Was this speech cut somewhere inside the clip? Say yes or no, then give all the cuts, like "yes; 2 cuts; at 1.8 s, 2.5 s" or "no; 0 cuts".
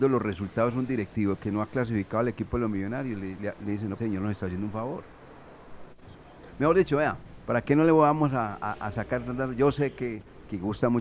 yes; 2 cuts; at 4.0 s, 6.5 s